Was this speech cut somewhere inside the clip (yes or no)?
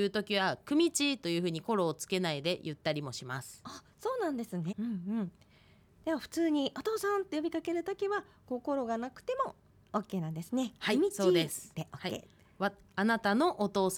yes